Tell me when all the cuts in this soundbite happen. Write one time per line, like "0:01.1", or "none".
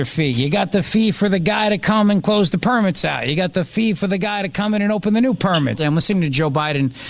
0:05.8